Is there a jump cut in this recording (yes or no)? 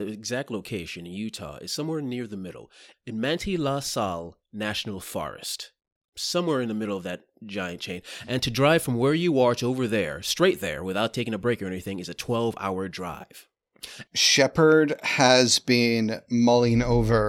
yes